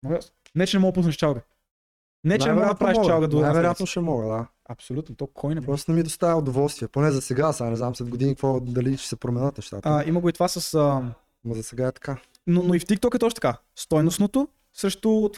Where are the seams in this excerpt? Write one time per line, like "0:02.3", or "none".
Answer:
none